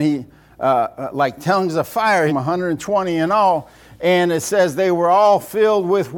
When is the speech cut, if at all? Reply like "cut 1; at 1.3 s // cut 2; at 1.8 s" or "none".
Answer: cut 1; at 2.3 s